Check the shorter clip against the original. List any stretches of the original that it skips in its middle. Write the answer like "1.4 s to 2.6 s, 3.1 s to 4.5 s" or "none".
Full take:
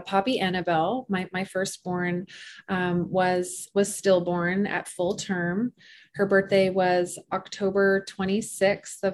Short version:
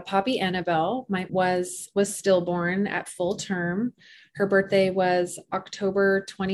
1.3 s to 3.1 s